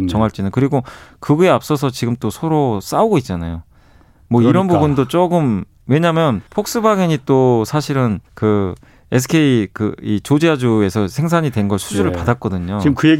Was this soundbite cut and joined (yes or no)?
yes